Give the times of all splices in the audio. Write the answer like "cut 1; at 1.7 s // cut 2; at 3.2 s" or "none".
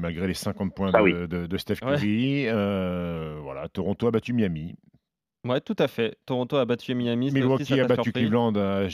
none